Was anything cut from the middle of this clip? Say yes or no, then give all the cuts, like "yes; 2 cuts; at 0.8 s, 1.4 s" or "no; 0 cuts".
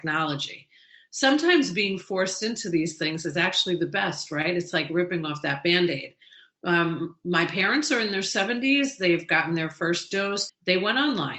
yes; 1 cut; at 10.5 s